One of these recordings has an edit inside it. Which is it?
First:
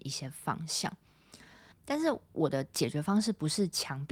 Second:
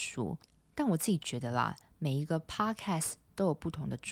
first; 1 cut; at 1.7 s

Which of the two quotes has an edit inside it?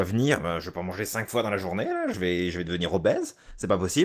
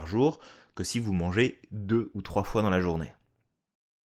first; 1 cut; at 2.1 s

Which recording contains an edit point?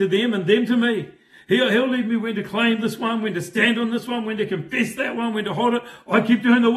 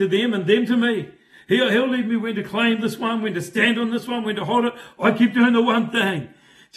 second; 1 cut; at 4.2 s

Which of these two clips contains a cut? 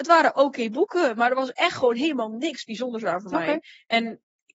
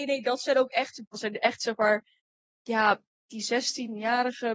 second; 1 cut; at 1.1 s

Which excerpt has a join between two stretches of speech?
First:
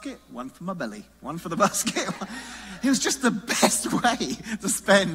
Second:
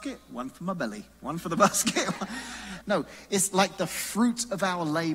second; 1 cut; at 2.8 s

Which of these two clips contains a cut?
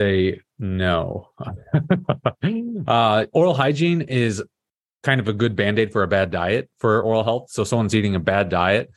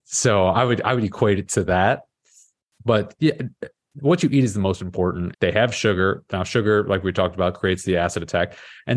second; 1 cut; at 5.3 s

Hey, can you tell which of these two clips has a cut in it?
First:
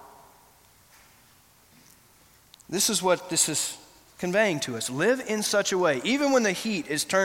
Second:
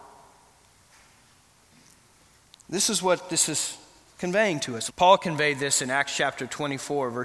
second; 1 cut; at 4.9 s

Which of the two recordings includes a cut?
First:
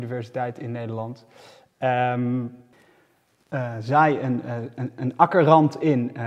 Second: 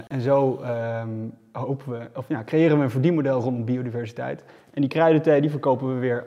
first; 1 cut; at 2.7 s

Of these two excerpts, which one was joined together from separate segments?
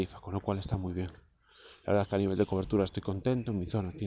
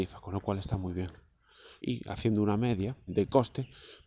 second; 2 cuts; at 1.8 s, 3.1 s

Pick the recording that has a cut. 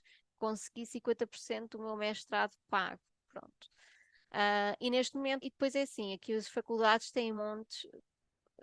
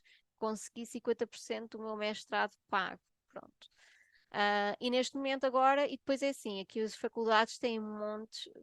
first; 2 cuts; at 5.4 s, 7.4 s

